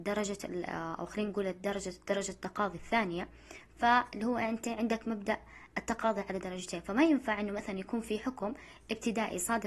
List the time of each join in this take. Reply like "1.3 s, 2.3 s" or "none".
none